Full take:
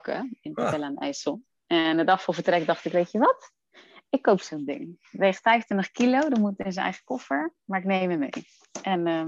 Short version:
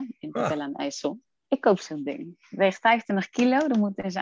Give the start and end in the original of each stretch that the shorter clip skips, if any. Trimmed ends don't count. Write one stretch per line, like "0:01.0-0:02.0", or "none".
0:01.7-0:04.0